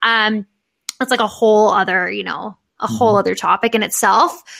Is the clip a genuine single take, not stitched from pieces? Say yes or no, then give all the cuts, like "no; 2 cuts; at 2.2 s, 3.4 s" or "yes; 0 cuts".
yes; 0 cuts